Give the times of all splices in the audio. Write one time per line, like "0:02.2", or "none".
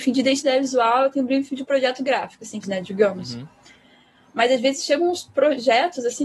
0:02.6

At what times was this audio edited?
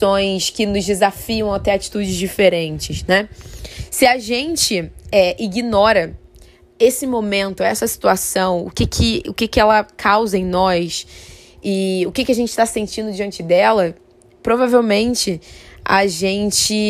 none

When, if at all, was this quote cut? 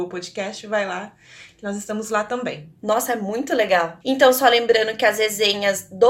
0:04.0

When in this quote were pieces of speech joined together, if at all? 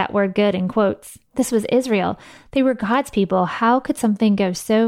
0:01.3

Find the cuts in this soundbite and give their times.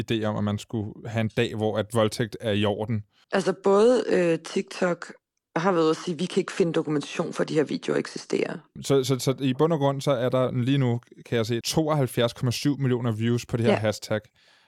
0:03.2
0:08.8
0:11.6

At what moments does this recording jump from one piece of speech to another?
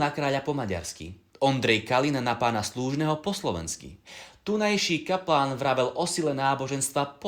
none

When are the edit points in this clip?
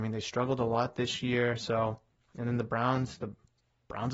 none

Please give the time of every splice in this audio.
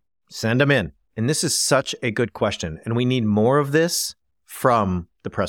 0:01.0

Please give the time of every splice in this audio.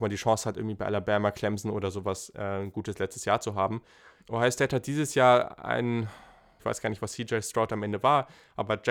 0:04.2
0:06.6

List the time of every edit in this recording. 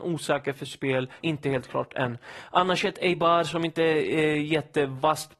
0:01.2

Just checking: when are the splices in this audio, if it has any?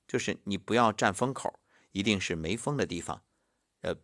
none

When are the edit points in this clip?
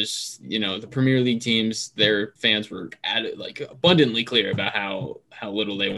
0:02.4

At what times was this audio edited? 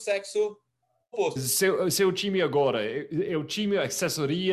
0:01.4

